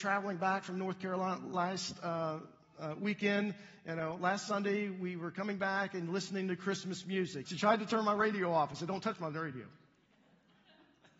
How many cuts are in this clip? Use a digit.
1